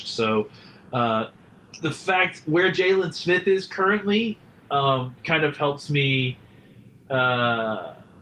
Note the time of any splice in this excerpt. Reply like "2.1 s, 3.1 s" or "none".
none